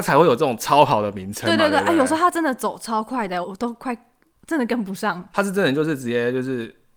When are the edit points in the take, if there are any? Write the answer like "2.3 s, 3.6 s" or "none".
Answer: 3.4 s, 5.3 s